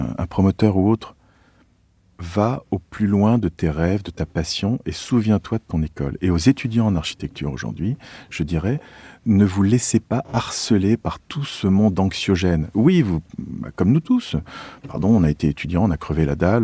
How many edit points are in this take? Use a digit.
0